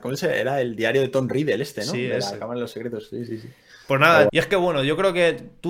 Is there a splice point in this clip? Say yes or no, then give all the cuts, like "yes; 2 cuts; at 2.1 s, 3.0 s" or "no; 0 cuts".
yes; 1 cut; at 4.3 s